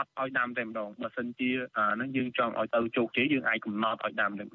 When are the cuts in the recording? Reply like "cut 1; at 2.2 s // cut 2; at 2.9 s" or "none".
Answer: cut 1; at 3.3 s